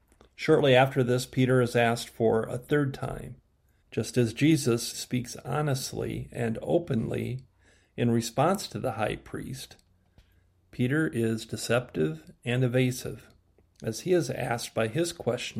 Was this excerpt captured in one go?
no; 2 cuts; at 3.8 s, 4.9 s

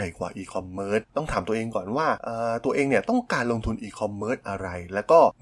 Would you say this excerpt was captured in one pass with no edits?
yes; 0 cuts

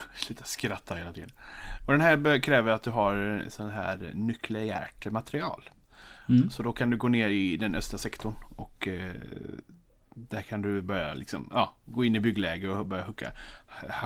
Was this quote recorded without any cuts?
yes; 0 cuts

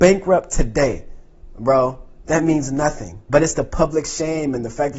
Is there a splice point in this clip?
yes; 1 cut; at 3.3 s

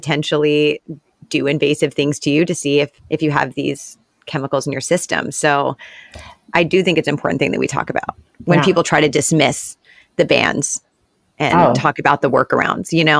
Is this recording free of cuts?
no; 1 cut; at 3.0 s

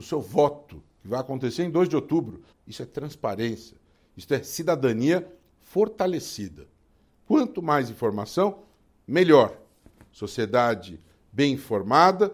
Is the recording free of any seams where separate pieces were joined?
no; 1 cut; at 2.5 s

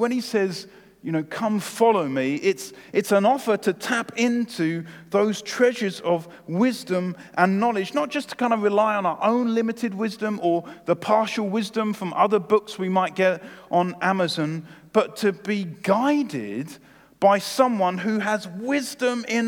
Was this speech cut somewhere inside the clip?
no; 0 cuts

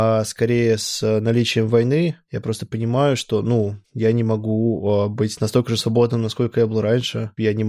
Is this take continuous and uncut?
yes; 0 cuts

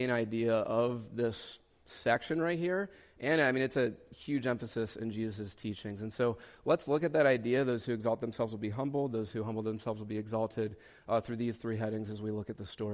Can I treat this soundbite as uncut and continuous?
yes; 0 cuts

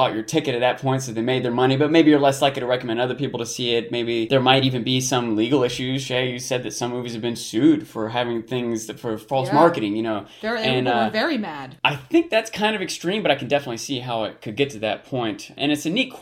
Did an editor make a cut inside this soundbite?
no; 0 cuts

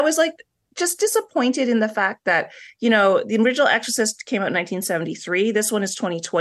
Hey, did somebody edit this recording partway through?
no; 0 cuts

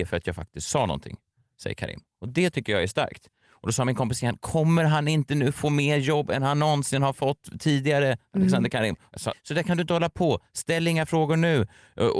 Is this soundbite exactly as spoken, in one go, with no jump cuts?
no; 1 cut; at 9.3 s

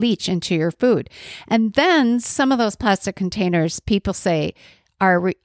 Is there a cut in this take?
no; 0 cuts

